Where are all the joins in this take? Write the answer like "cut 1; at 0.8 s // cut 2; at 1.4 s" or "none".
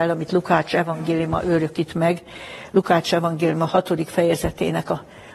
none